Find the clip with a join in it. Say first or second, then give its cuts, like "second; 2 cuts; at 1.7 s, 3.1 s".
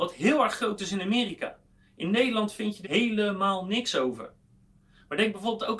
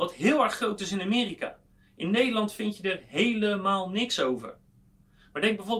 first; 1 cut; at 2.8 s